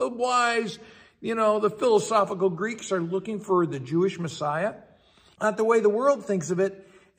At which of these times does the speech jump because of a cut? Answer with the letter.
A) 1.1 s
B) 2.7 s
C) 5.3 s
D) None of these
C